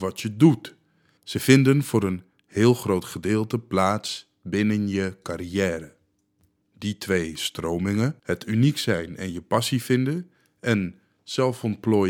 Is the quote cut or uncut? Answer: cut